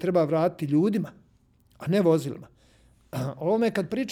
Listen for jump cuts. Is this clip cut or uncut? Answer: uncut